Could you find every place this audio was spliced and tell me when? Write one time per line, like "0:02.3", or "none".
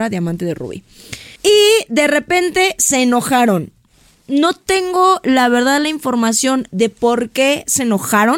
0:01.4

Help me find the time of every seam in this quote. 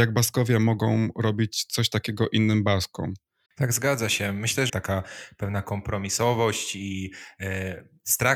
0:03.5
0:04.7

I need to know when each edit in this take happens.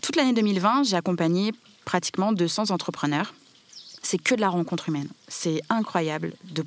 none

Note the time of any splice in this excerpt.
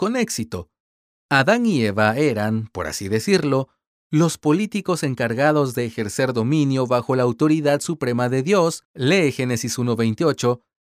none

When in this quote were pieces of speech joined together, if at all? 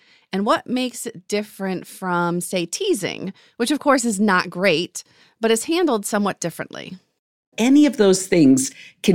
0:07.5

